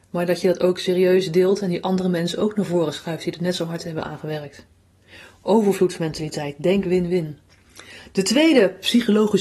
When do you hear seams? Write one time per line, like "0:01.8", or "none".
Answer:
none